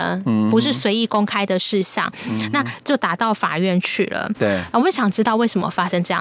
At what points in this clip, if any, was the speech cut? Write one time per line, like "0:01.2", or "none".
0:04.3